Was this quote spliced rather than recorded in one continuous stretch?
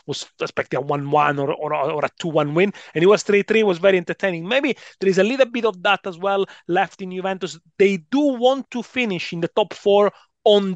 no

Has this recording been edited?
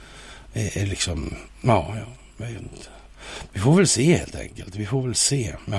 no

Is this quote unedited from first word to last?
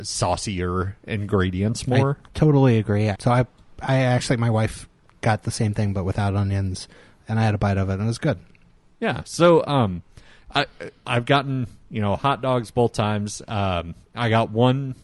no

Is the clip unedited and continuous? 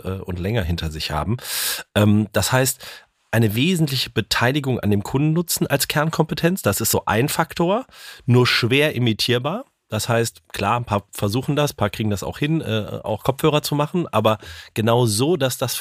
yes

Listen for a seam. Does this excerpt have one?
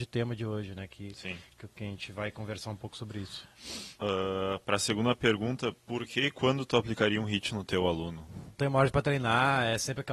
yes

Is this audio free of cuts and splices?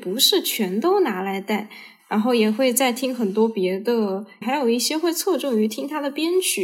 no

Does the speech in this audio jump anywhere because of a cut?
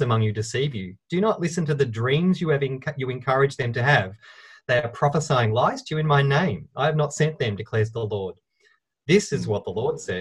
no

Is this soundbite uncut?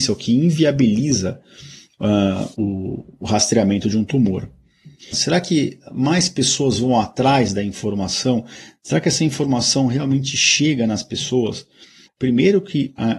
no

